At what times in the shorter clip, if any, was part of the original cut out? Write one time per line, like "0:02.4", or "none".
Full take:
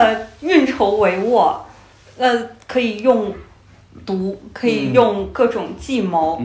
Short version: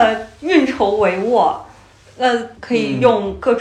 0:02.6